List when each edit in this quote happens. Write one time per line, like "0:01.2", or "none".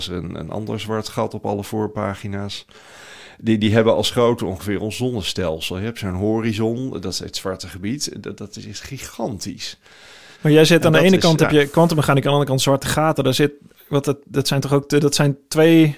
0:10.3